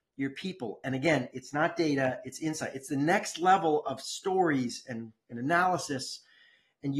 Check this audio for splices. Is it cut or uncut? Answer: uncut